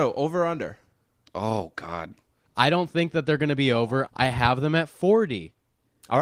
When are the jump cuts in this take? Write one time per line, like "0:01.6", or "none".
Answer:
0:02.5
0:04.1